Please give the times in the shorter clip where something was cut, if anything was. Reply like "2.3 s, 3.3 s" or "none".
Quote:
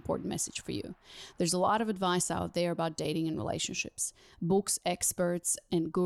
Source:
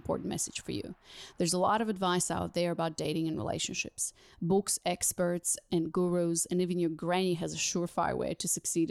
none